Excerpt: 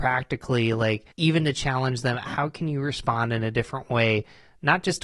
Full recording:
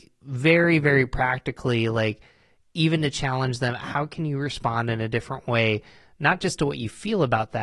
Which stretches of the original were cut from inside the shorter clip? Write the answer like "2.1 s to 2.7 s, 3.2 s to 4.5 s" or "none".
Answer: 2.3 s to 2.7 s